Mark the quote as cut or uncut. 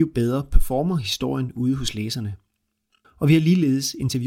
cut